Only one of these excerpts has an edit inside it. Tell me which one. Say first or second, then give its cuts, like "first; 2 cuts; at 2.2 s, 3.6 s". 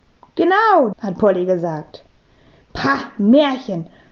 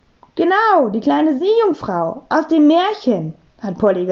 first; 1 cut; at 0.9 s